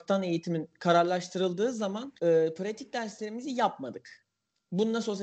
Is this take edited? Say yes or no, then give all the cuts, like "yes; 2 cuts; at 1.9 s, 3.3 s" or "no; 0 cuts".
yes; 1 cut; at 2.2 s